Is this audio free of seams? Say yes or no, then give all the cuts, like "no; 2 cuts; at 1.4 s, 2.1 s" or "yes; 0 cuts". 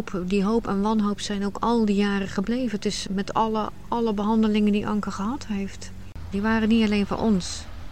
no; 2 cuts; at 3.1 s, 6.3 s